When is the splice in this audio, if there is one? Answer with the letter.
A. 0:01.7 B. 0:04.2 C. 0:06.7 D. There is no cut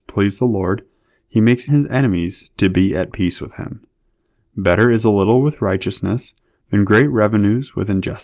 A